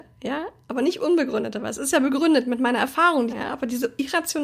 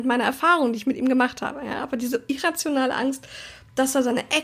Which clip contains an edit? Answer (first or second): first